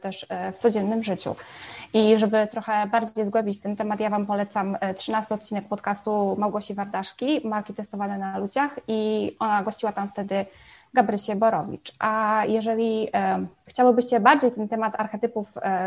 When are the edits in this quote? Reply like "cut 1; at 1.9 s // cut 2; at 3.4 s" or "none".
none